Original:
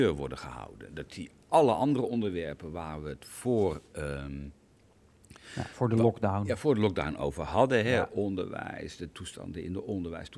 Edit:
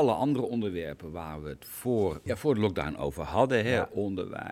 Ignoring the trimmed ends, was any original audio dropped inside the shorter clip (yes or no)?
yes